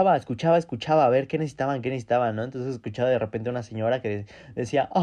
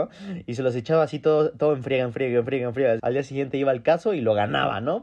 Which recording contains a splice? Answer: second; 1 cut; at 3.0 s

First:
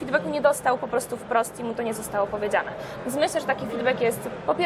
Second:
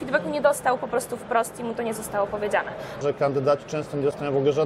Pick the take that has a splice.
second; 1 cut; at 3.0 s

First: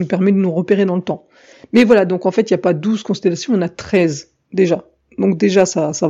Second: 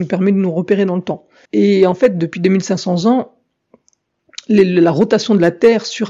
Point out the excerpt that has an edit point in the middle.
second; 1 cut; at 1.5 s

